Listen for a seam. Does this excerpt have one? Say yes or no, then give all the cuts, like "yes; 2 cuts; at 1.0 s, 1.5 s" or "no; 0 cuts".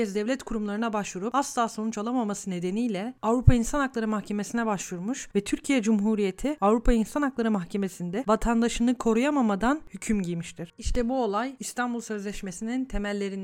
no; 0 cuts